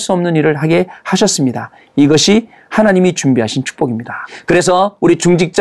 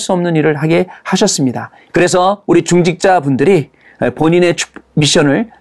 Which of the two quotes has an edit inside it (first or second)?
second